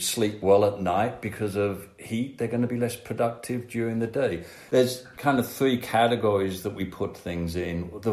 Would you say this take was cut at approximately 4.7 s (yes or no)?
yes